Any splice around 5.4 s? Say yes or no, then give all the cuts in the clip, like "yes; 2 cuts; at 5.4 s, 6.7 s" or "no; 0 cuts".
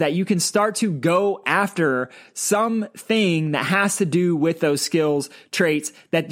no; 0 cuts